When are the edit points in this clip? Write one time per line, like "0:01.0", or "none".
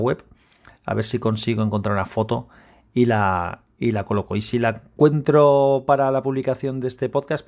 none